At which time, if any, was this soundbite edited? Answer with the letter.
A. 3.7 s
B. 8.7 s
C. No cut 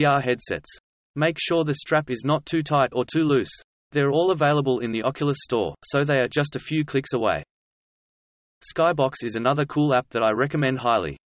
A